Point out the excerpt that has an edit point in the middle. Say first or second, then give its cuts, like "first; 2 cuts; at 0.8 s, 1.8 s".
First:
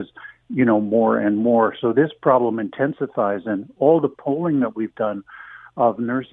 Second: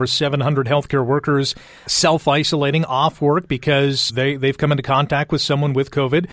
second; 2 cuts; at 1.9 s, 4.1 s